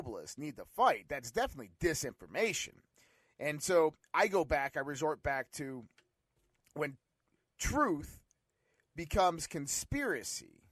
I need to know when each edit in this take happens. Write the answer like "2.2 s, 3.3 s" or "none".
none